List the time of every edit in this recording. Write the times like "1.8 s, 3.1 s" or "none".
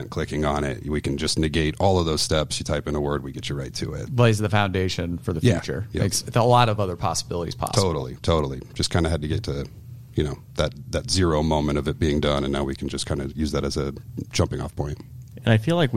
4.1 s